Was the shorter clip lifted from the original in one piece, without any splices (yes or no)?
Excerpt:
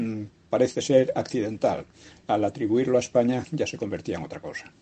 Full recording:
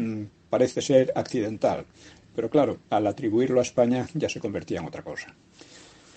no